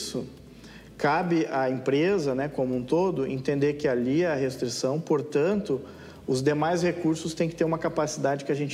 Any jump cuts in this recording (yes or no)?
no